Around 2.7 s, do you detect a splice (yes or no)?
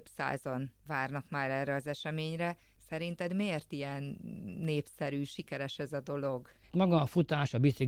no